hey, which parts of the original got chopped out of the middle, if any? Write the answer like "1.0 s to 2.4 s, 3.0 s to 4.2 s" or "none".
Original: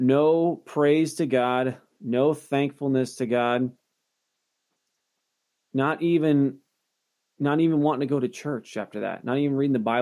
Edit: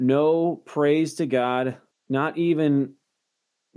1.9 s to 5.5 s